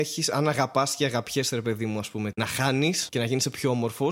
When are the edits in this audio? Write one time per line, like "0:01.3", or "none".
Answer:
0:02.3